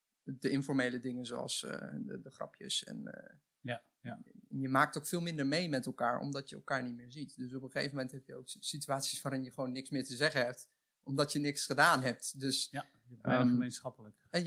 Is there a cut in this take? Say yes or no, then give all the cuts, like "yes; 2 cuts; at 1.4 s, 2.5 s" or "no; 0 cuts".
no; 0 cuts